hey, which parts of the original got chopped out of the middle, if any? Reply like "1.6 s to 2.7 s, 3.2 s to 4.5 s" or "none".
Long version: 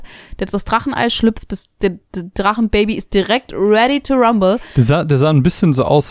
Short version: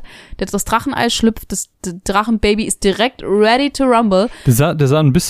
1.7 s to 2.0 s